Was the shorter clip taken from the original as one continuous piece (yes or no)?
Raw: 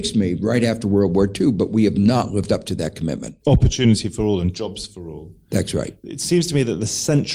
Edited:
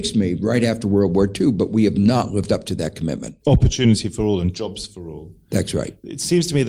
yes